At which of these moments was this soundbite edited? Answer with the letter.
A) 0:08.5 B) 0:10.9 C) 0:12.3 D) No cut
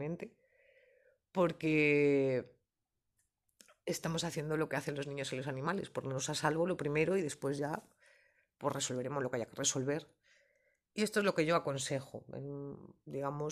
D